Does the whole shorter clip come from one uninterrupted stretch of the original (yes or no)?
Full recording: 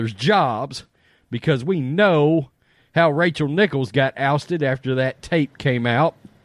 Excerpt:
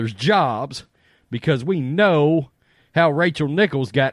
yes